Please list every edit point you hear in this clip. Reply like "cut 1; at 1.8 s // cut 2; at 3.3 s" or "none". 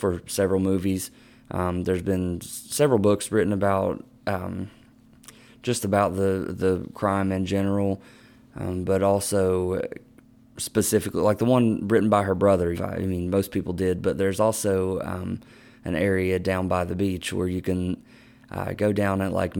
cut 1; at 12.7 s